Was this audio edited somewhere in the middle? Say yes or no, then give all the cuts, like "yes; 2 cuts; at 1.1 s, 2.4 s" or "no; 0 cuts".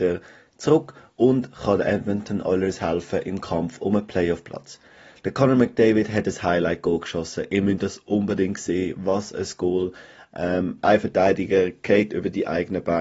no; 0 cuts